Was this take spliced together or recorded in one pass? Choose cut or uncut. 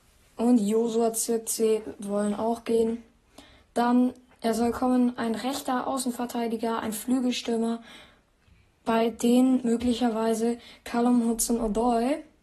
uncut